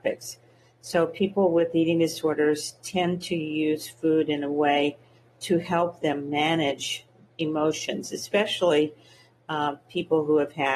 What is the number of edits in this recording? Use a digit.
0